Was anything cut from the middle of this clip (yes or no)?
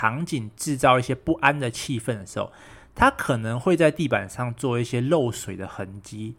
no